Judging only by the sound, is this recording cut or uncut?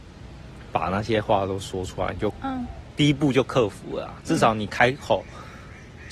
uncut